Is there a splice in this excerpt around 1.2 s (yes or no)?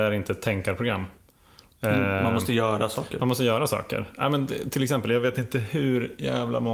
no